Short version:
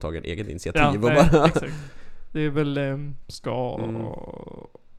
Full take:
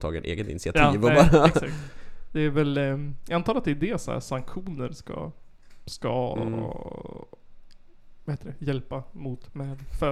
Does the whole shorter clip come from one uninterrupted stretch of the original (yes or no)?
no